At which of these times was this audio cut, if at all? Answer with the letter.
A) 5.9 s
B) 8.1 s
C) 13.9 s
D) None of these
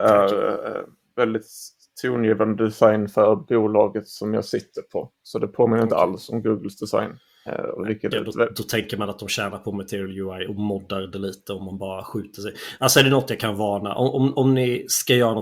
B